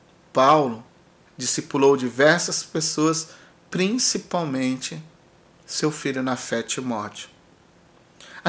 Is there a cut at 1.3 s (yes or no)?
yes